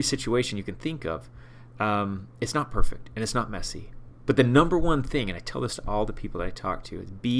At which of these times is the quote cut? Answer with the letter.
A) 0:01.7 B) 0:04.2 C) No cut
B